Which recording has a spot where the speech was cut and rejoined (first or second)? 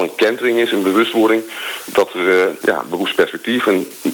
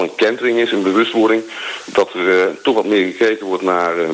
first